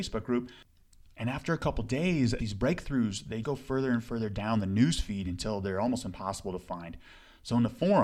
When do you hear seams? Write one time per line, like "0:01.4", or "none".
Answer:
0:02.4
0:03.4